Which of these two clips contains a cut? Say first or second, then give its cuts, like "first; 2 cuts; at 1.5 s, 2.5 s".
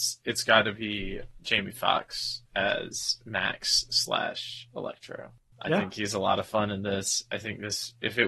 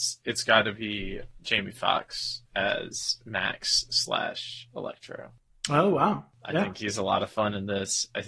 first; 1 cut; at 5.5 s